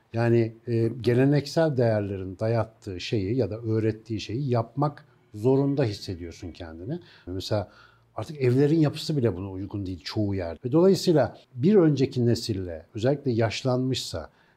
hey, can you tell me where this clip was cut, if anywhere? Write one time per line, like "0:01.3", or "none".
0:07.3
0:10.6